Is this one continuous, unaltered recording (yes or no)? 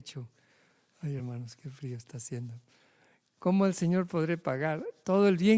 yes